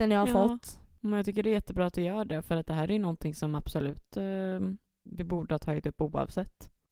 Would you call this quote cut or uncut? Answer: uncut